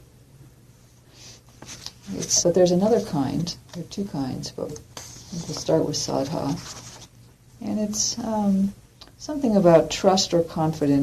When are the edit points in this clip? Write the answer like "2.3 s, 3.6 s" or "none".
2.4 s, 4.7 s, 7.5 s